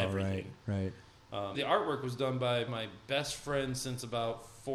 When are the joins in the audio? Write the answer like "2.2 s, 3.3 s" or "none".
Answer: 1.5 s, 2.7 s